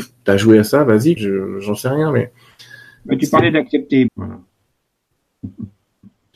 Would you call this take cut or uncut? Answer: cut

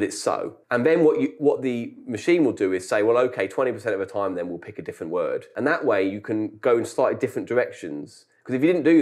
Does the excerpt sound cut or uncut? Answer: uncut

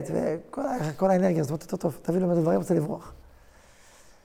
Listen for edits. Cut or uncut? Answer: uncut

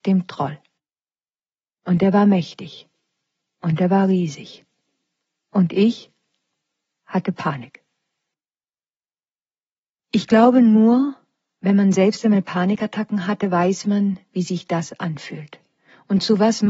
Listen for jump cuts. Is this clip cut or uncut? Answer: uncut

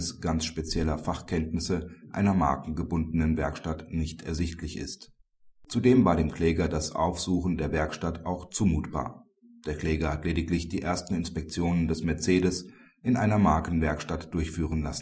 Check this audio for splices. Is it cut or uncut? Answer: uncut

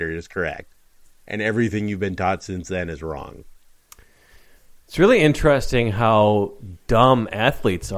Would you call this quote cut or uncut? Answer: uncut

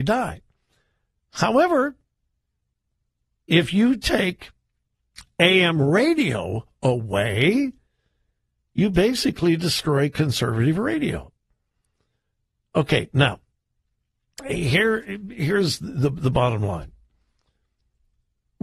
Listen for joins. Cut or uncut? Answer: uncut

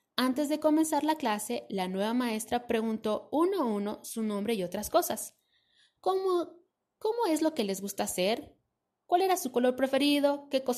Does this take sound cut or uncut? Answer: uncut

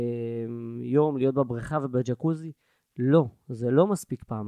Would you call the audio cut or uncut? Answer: uncut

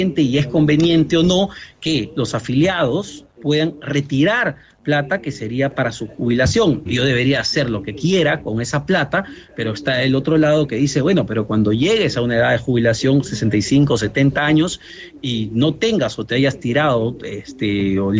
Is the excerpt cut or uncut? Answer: cut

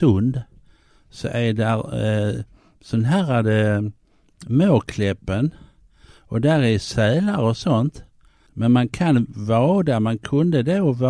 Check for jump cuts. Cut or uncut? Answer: cut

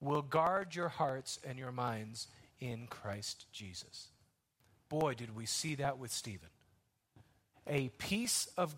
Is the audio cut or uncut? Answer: cut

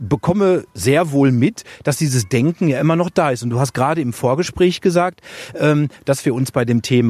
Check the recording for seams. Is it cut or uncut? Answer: uncut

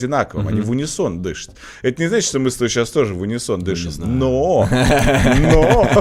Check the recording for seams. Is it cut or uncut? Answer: uncut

